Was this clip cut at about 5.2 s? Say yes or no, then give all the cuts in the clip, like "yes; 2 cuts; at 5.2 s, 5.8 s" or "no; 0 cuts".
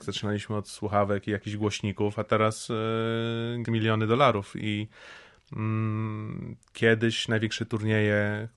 no; 1 cut; at 3.6 s